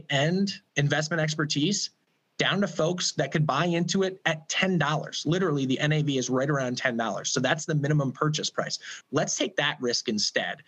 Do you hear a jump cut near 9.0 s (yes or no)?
yes